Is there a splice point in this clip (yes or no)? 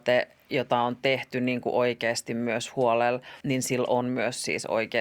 yes